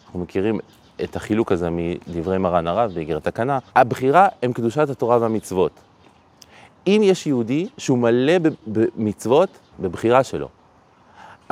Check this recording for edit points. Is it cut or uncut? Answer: cut